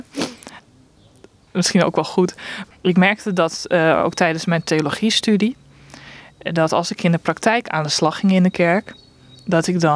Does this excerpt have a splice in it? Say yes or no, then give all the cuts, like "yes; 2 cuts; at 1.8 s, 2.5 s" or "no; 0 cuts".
yes; 1 cut; at 2.7 s